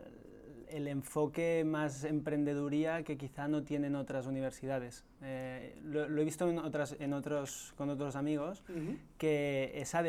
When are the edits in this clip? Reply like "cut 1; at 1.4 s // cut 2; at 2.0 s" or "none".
none